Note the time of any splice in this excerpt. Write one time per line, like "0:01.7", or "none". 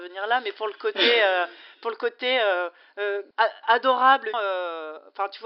0:03.3
0:04.3